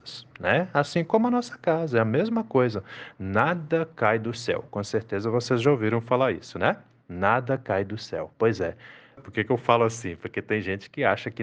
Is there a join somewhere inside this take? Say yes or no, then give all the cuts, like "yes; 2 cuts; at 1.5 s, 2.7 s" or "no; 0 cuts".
yes; 1 cut; at 9.2 s